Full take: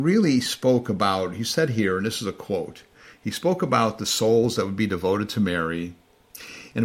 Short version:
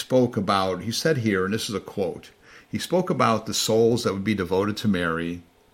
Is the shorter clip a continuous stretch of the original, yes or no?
yes